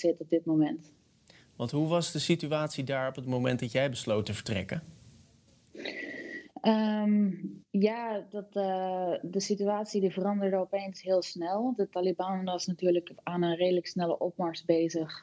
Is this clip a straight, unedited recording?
yes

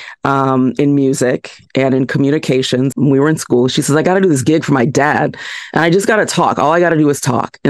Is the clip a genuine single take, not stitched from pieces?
no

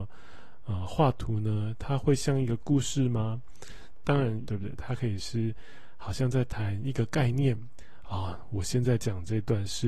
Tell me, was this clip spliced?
yes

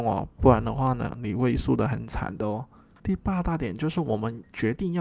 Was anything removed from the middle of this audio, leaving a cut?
yes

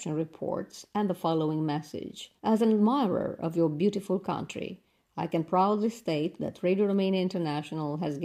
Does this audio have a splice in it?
yes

